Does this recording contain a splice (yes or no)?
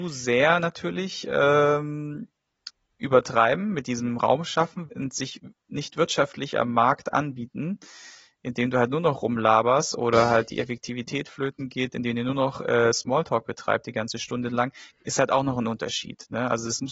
yes